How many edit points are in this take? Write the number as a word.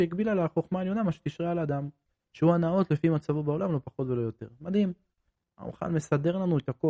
zero